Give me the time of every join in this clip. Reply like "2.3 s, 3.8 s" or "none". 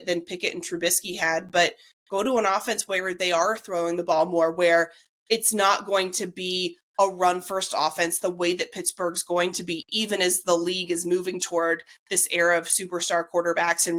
none